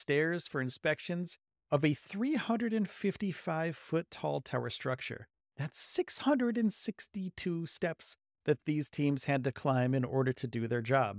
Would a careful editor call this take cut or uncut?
uncut